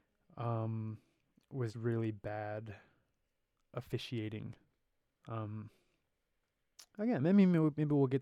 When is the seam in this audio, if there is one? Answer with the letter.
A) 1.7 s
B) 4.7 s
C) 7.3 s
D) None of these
A